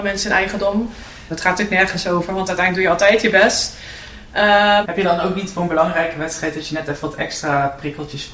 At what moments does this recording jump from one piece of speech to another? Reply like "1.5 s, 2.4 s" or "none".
1.3 s, 4.8 s